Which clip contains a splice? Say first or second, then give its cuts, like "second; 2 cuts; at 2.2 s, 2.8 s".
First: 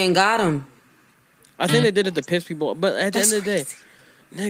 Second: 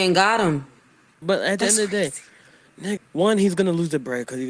second; 2 cuts; at 1.2 s, 3.0 s